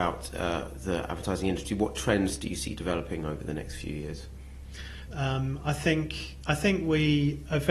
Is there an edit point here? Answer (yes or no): yes